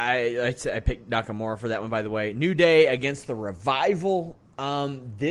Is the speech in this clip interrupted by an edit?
no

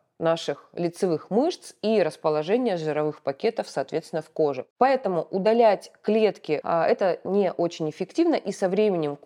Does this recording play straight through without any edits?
no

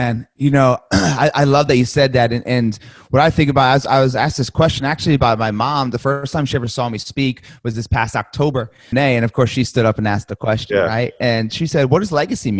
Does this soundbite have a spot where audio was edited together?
yes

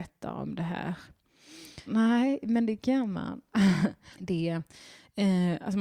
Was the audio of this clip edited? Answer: yes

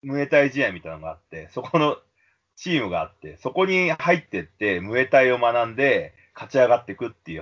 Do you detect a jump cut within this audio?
no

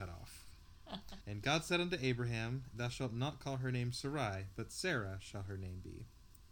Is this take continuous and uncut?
no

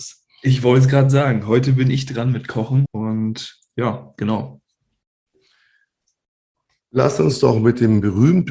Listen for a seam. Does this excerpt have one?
yes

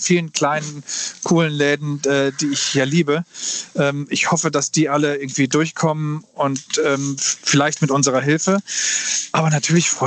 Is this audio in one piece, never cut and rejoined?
yes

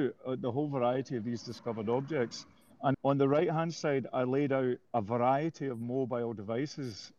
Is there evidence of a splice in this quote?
yes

